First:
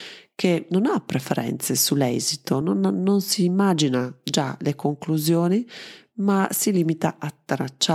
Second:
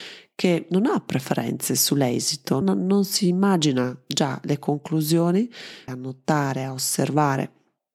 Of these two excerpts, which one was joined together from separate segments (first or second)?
second